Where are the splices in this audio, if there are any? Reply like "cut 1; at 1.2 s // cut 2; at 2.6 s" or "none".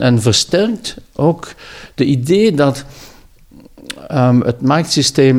none